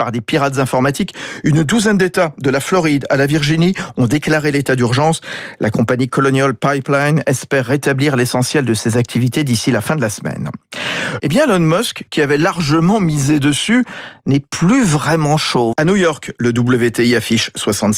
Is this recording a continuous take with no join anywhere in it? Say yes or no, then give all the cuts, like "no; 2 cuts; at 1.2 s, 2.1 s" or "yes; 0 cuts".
no; 2 cuts; at 11.2 s, 15.7 s